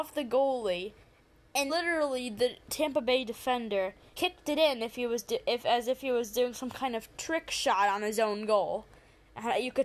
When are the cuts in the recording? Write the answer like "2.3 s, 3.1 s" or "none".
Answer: 1.7 s, 4.1 s